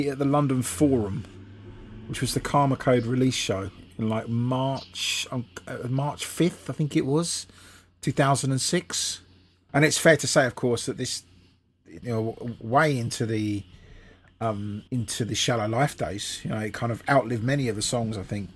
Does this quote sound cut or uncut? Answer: cut